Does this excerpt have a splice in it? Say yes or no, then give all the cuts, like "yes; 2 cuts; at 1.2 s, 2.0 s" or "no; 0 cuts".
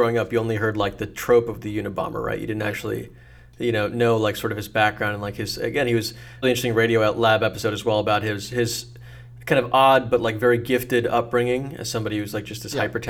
yes; 1 cut; at 6.4 s